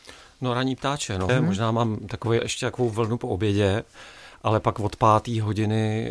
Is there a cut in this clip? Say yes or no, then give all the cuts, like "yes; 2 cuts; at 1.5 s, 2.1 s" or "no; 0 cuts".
yes; 2 cuts; at 1.3 s, 2.4 s